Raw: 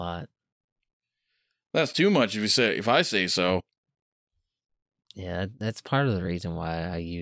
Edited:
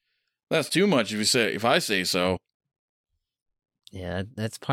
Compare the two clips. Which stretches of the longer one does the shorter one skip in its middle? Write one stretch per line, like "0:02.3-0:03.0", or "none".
none